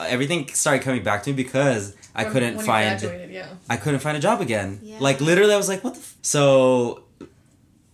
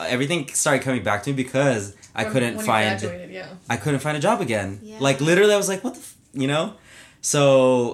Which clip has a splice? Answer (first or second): first